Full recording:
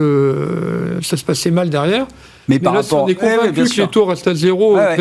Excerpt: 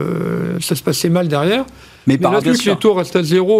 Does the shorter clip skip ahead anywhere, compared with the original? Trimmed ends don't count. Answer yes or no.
yes